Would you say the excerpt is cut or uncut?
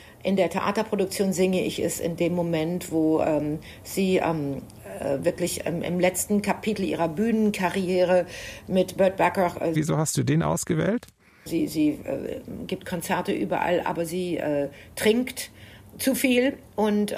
cut